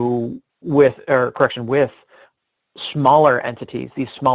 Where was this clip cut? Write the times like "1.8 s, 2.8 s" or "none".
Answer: none

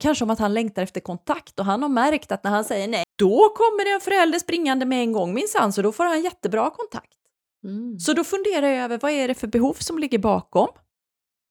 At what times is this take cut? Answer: 3.0 s

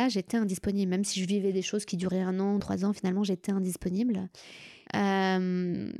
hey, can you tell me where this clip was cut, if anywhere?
2.6 s, 4.9 s

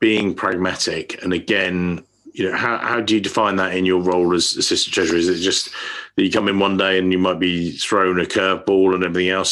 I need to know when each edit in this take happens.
none

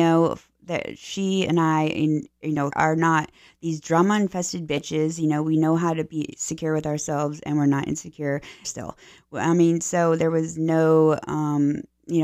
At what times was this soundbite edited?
2.7 s, 8.6 s

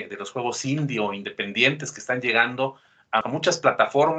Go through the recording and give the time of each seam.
3.2 s

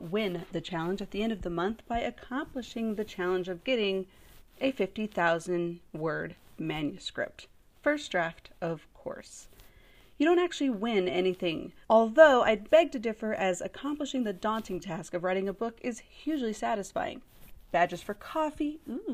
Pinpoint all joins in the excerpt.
11.8 s, 17.7 s

